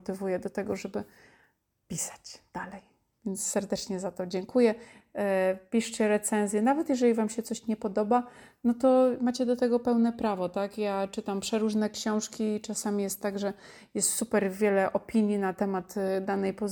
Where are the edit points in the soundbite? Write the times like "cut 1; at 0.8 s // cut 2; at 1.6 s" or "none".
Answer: none